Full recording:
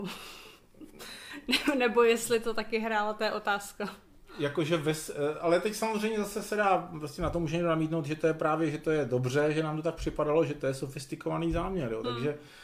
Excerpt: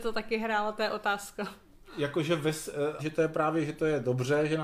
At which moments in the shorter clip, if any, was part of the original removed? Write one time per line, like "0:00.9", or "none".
0:03.0